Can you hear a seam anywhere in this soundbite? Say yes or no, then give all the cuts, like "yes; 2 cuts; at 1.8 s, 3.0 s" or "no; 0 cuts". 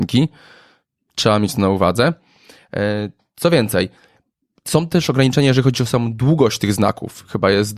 no; 0 cuts